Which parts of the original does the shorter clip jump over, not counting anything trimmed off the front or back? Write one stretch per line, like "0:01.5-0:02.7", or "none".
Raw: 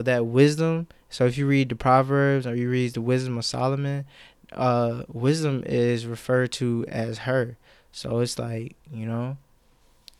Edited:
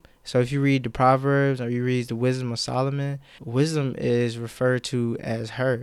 0:04.2-0:05.1

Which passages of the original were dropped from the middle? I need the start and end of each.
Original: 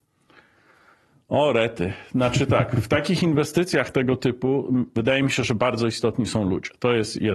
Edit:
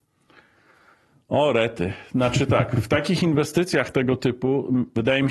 none

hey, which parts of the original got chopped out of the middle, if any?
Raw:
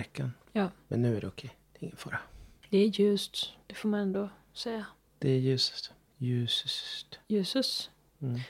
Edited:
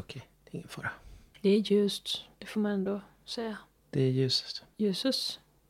0:06.0-0:07.2

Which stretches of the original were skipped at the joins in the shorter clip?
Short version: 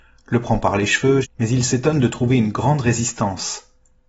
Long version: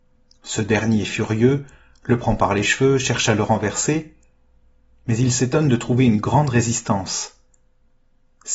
0:03.0-0:04.9

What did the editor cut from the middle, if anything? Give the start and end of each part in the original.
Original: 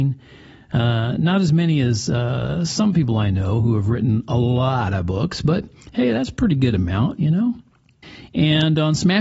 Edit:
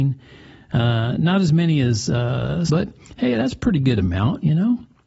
0:02.7-0:05.4

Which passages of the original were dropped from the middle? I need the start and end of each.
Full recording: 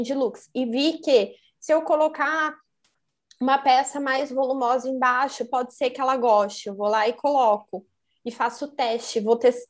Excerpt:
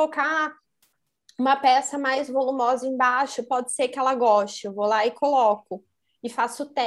none

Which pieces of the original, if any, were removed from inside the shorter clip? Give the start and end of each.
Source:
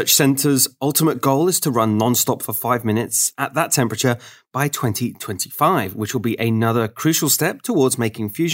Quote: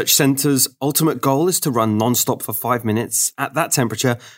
none

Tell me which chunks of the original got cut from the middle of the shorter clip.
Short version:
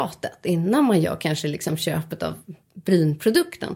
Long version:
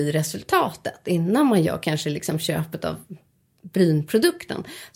0:03.2-0:03.5

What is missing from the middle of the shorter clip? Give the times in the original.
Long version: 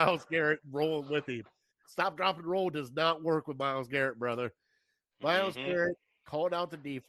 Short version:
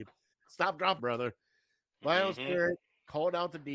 0:02.4-0:04.2

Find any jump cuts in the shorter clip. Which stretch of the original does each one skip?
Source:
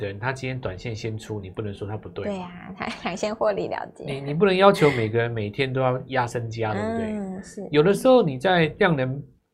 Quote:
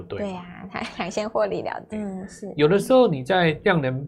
0:04.0-0:07.1

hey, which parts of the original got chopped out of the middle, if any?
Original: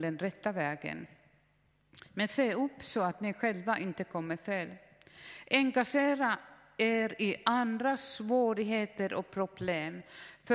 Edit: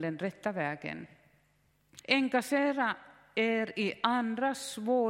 0:02.0-0:05.4

